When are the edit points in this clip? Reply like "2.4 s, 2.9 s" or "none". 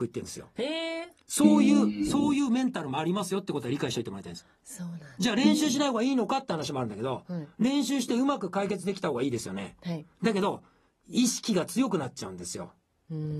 none